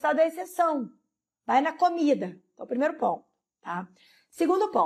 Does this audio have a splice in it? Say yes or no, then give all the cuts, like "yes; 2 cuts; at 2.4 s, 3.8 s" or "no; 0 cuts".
no; 0 cuts